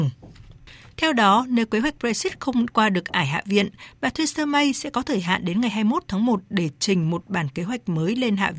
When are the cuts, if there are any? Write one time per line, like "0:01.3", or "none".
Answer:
0:00.9